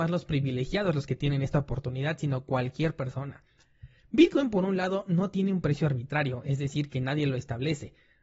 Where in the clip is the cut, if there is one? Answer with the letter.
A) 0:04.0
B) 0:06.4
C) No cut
C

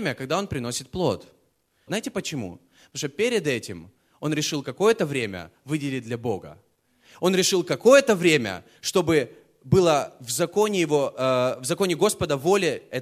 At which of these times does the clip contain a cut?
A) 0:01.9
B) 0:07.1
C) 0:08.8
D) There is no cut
A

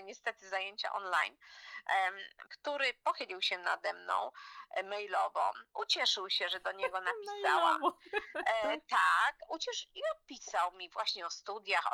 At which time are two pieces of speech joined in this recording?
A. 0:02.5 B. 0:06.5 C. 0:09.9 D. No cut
A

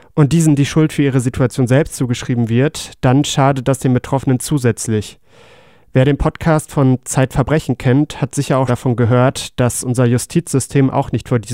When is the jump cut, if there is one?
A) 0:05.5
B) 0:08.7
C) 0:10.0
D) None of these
B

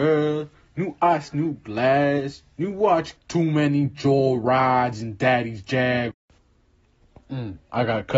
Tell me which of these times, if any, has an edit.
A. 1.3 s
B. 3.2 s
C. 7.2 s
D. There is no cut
B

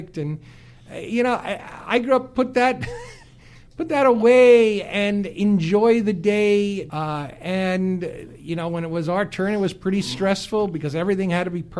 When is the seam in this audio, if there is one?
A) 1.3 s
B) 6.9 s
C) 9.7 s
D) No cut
B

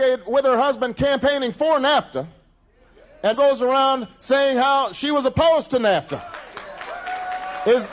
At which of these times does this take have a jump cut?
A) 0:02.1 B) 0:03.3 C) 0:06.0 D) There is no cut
B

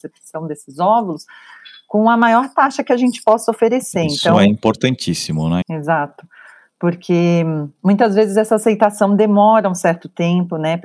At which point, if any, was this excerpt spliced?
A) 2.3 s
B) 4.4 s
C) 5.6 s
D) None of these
C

